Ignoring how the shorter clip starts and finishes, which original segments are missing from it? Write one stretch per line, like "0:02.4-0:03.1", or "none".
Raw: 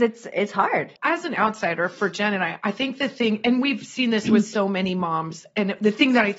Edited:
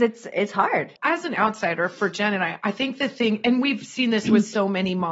none